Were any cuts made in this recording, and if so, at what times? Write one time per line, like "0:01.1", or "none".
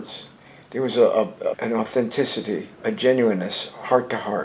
0:01.5
0:02.7